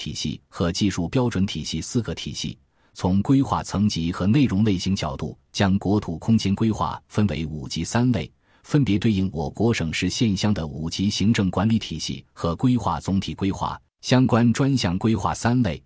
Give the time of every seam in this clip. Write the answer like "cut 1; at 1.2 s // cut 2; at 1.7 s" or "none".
cut 1; at 9.5 s // cut 2; at 13.9 s